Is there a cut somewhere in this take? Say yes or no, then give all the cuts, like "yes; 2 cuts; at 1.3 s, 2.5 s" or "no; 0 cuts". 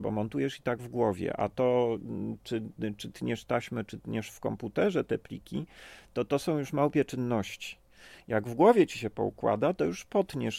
no; 0 cuts